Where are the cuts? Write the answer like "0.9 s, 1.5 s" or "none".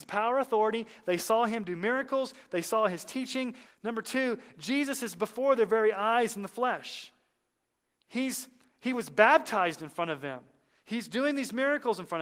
3.7 s